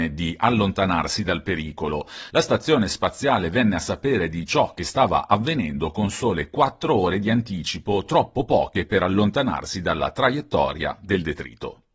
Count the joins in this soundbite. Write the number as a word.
one